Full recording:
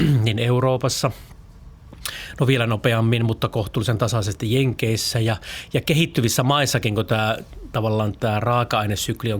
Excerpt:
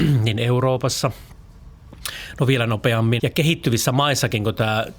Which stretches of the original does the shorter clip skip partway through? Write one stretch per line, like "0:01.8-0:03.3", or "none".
0:03.2-0:05.7